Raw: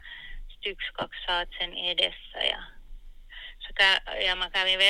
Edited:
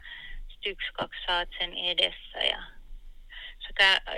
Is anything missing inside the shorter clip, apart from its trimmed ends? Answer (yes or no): no